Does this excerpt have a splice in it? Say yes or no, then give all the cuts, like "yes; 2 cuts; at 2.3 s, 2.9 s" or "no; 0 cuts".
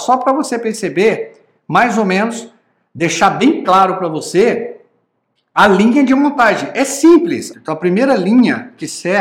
yes; 1 cut; at 7.5 s